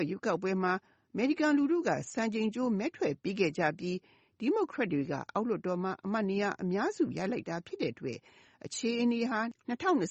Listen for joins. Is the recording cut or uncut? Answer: uncut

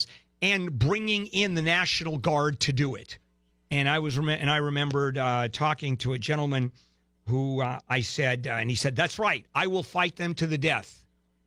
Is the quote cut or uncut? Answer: cut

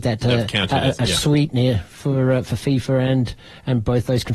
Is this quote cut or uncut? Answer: uncut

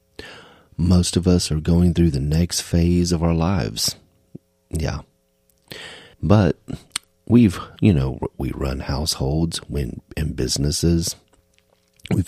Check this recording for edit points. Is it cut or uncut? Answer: cut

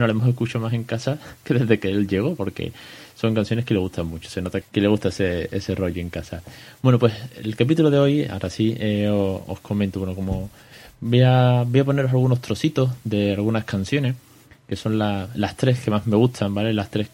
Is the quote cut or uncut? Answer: cut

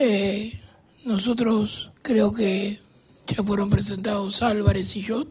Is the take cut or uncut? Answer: cut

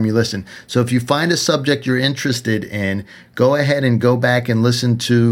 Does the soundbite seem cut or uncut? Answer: uncut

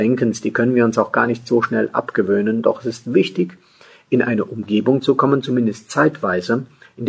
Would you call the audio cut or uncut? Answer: uncut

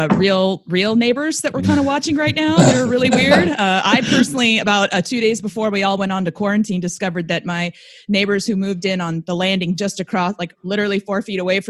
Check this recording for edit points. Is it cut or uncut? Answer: uncut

